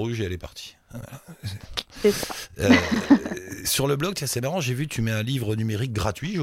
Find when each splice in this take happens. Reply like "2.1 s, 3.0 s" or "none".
none